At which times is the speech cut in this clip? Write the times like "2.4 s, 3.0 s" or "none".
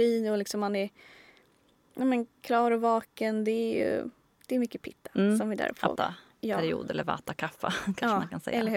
6.0 s